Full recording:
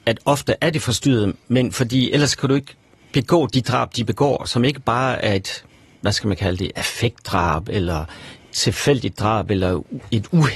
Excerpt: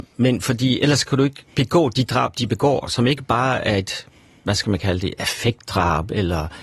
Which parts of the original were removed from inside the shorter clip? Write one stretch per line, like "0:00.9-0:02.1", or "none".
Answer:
0:02.8-0:03.1